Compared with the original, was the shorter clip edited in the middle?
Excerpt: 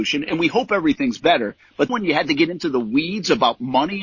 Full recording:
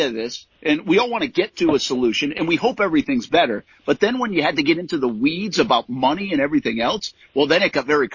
yes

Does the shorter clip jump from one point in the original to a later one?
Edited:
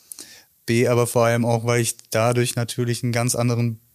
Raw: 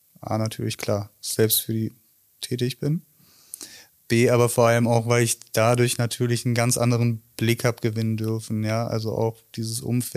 no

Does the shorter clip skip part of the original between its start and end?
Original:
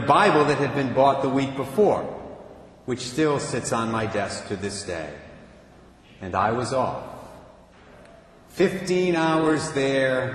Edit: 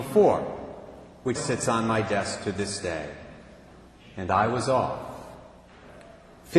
yes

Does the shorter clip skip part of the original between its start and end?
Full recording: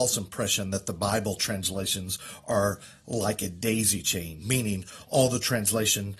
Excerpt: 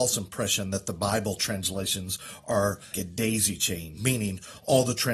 yes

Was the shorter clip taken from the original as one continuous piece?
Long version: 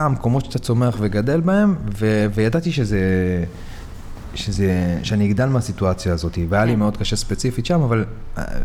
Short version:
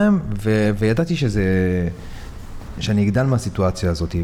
no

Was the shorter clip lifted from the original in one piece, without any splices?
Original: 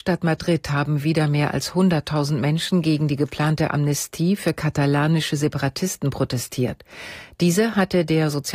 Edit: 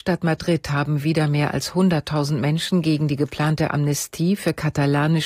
yes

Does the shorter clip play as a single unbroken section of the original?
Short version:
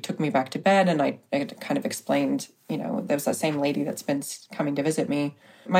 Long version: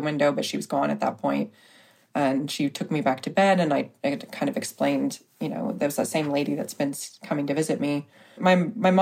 yes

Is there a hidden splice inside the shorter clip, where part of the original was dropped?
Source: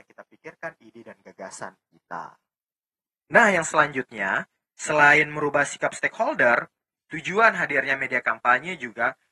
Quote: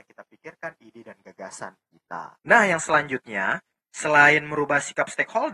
yes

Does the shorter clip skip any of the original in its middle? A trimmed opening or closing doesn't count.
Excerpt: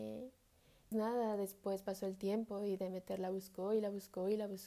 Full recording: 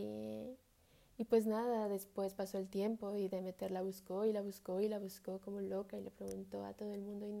yes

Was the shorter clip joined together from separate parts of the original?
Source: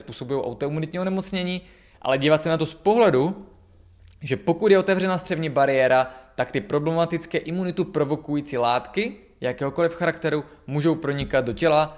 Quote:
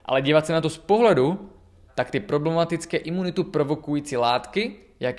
yes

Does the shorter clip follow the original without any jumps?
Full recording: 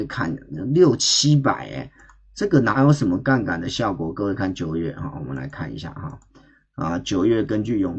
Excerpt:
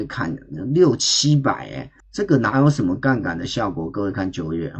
no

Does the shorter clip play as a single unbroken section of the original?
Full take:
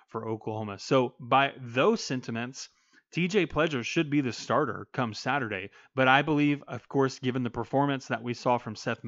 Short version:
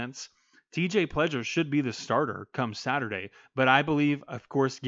yes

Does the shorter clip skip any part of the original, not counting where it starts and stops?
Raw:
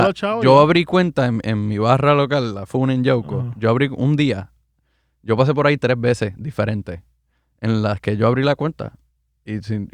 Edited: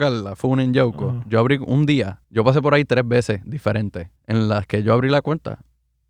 yes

